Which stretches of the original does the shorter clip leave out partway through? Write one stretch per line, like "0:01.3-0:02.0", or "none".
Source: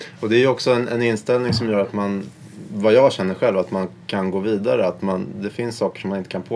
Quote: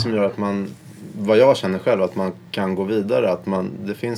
none